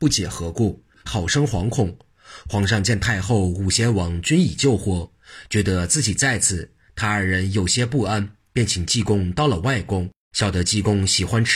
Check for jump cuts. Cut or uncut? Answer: cut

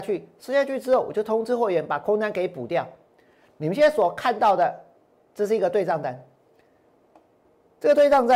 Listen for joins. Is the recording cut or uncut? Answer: uncut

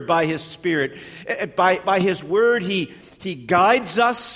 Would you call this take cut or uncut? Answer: uncut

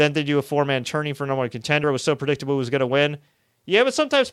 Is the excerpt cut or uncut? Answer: uncut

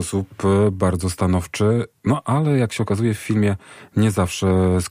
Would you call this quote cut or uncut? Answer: cut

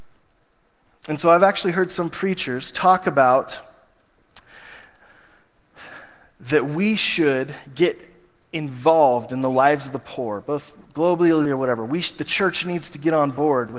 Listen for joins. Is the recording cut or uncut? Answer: cut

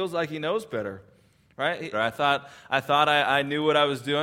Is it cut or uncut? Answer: cut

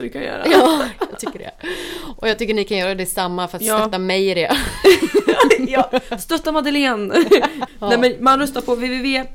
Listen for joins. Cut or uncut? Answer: uncut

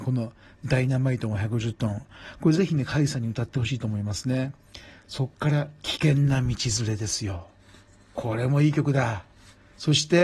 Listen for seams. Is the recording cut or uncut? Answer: uncut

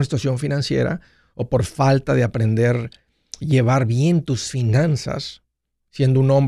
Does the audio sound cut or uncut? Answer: cut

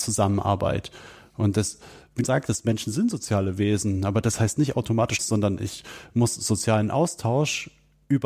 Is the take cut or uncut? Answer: cut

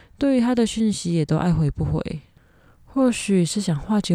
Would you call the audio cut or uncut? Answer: uncut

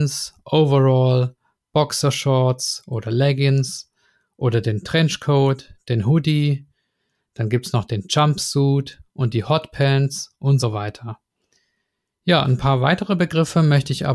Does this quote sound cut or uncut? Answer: uncut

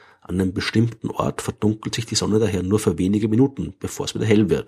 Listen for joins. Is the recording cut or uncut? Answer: uncut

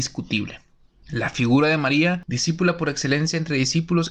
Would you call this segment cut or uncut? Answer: uncut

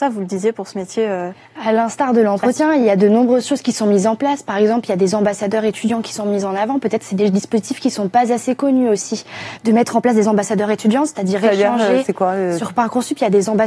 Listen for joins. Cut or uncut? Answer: uncut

